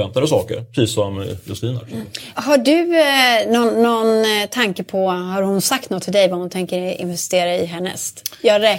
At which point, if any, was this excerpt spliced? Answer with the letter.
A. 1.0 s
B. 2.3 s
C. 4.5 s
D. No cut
D